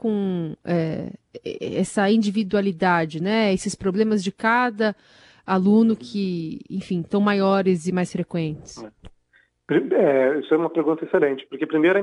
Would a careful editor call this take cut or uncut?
uncut